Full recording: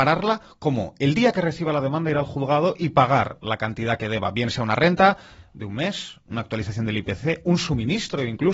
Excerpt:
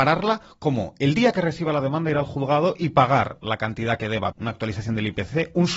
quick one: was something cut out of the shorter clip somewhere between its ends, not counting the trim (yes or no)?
yes